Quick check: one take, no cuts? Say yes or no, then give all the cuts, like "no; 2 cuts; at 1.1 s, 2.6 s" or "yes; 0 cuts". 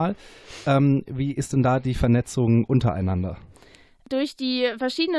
yes; 0 cuts